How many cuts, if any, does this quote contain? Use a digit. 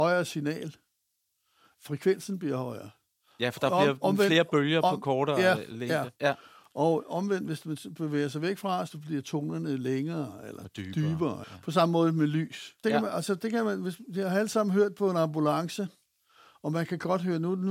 2